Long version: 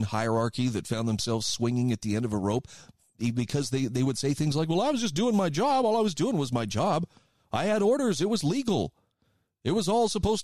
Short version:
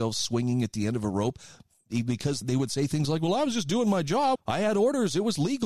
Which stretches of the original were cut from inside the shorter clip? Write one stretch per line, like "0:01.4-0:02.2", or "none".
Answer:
0:03.7-0:03.9
0:05.8-0:07.4